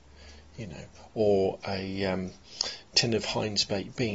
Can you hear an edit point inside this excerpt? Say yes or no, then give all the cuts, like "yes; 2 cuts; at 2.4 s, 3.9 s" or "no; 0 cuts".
no; 0 cuts